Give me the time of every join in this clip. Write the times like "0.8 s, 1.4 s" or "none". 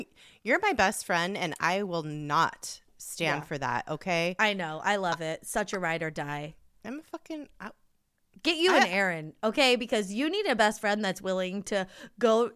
none